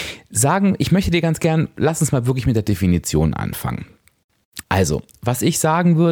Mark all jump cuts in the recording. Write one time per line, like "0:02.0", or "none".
0:04.6